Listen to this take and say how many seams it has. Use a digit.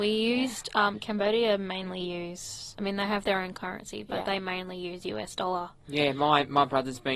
0